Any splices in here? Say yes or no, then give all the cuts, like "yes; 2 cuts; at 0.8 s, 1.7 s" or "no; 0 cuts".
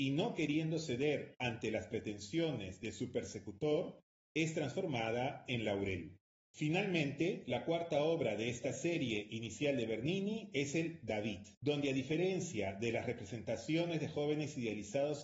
yes; 2 cuts; at 6.5 s, 11.5 s